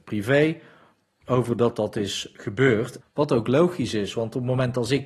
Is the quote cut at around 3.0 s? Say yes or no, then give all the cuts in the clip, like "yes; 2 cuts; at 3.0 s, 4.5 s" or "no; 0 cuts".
yes; 1 cut; at 3.0 s